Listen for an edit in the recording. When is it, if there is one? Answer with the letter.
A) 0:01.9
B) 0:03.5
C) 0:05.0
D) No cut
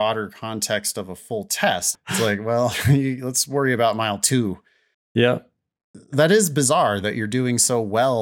A